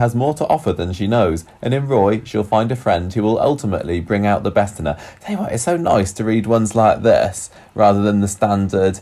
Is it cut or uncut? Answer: uncut